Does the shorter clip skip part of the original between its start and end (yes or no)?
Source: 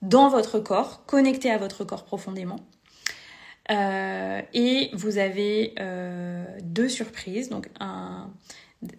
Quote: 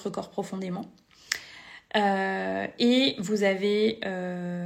no